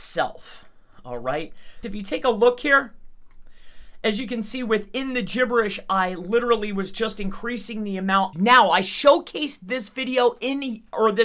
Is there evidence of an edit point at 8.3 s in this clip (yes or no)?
yes